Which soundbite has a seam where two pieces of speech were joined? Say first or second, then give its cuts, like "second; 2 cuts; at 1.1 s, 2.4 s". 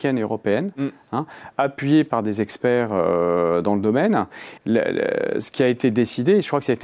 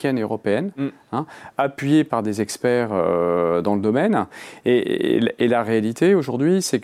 first; 1 cut; at 4.6 s